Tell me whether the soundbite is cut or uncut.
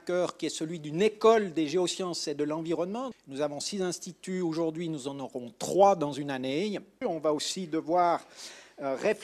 cut